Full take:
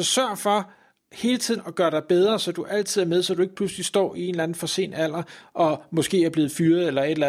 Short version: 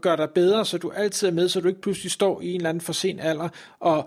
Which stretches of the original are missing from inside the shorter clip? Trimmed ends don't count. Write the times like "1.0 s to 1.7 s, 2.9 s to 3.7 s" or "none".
none